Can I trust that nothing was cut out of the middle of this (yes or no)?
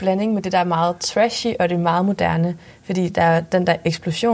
yes